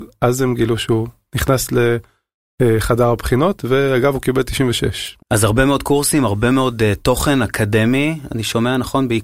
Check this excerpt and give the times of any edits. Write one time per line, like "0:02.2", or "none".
0:05.2